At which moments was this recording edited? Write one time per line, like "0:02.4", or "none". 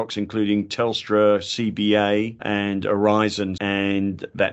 0:03.6